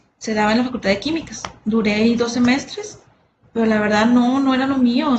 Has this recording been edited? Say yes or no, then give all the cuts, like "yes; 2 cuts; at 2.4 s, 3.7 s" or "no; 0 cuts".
no; 0 cuts